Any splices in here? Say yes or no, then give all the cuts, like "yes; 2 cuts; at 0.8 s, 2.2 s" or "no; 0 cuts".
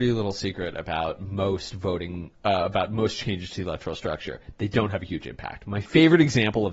no; 0 cuts